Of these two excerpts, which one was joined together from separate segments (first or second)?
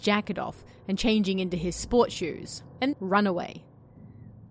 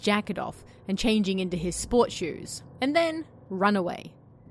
first